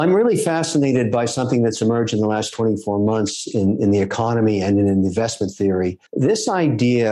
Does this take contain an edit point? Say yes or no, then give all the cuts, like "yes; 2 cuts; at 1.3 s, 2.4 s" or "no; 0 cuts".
yes; 1 cut; at 6.1 s